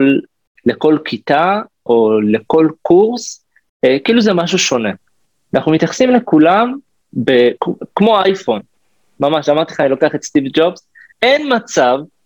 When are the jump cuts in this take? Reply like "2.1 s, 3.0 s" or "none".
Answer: 7.6 s, 11.1 s